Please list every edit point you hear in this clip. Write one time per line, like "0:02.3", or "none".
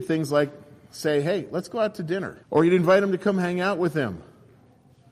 0:02.4